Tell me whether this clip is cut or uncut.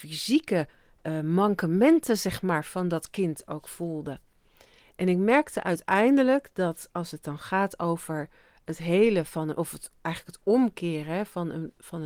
uncut